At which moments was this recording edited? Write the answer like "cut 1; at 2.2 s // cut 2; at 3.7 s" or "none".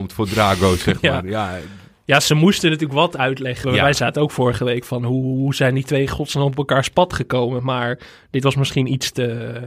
cut 1; at 3.6 s